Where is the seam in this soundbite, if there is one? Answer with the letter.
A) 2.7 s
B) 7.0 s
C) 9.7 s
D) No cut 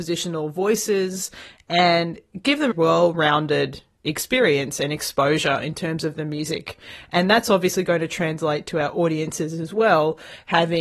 A